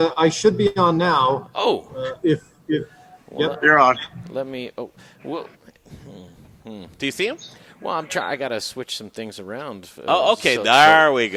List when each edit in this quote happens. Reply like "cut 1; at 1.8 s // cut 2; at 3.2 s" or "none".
none